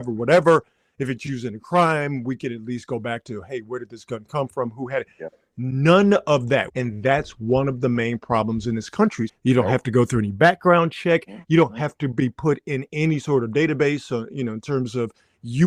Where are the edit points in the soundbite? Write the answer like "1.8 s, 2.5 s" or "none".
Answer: 6.7 s, 9.3 s, 11.4 s